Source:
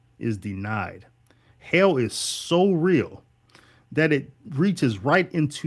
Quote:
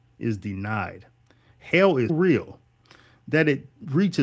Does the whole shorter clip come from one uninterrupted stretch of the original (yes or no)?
no